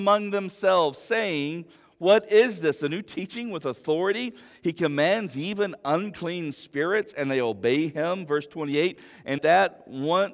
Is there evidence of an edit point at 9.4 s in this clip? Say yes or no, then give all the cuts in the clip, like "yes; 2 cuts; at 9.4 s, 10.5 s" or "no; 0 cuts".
yes; 1 cut; at 9.4 s